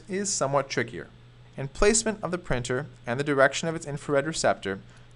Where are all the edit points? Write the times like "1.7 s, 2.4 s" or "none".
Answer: 1.4 s